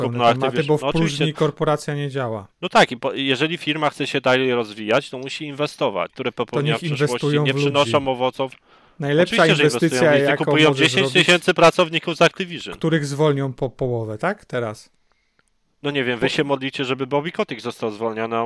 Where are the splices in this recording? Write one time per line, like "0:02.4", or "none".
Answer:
0:02.5
0:06.1